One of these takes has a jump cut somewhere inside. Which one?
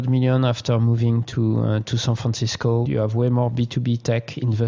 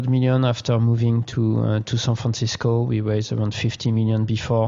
first; 1 cut; at 2.9 s

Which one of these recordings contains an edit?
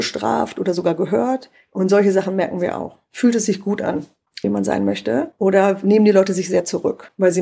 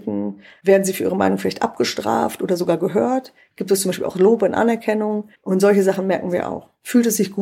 first; 2 cuts; at 1.7 s, 4.4 s

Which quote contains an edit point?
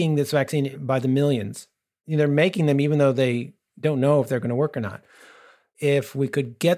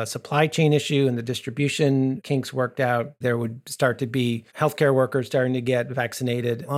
second; 2 cuts; at 3.2 s, 4.5 s

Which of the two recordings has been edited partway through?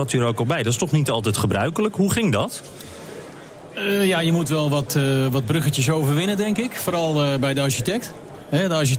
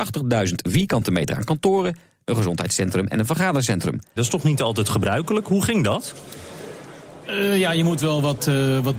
second; 2 cuts; at 2.2 s, 4.2 s

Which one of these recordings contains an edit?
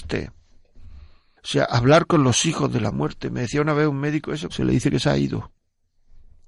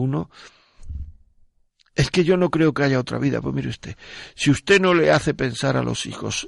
first; 2 cuts; at 1.4 s, 4.5 s

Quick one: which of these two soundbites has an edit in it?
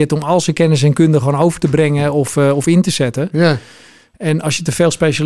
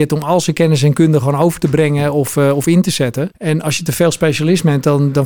second; 1 cut; at 3.3 s

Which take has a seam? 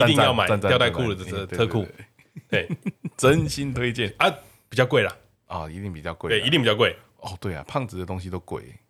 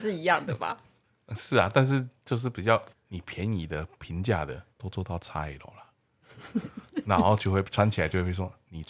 second; 2 cuts; at 2.9 s, 4.7 s

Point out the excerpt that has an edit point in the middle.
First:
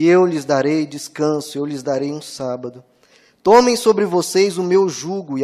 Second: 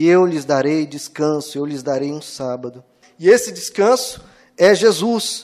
second; 1 cut; at 3.0 s

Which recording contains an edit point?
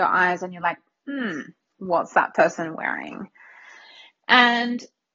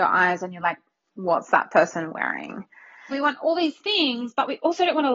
second; 2 cuts; at 1.0 s, 3.1 s

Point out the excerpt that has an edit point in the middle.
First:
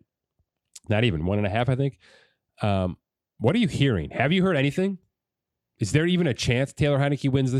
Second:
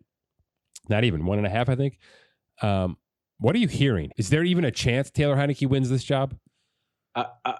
second; 1 cut; at 4.1 s

